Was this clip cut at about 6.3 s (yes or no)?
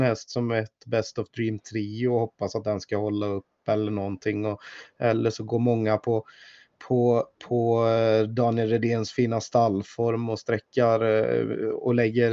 no